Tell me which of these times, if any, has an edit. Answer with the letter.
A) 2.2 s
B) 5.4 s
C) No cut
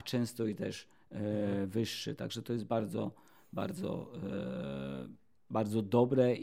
C